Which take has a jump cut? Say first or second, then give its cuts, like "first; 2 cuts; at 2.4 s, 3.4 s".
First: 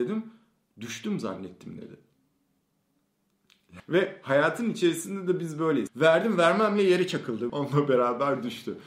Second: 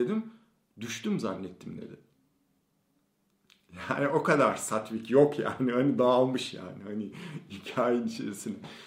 first; 3 cuts; at 3.8 s, 5.9 s, 7.5 s